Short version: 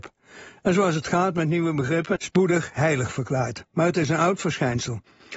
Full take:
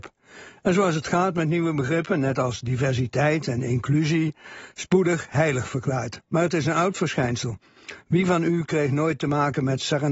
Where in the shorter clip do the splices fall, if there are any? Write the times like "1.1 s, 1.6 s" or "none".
2.2 s